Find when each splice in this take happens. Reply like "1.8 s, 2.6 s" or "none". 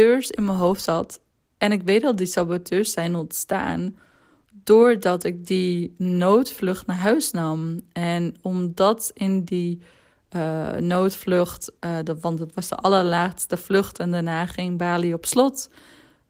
none